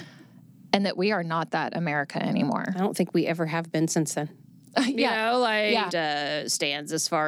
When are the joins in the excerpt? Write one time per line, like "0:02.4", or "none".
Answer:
0:05.9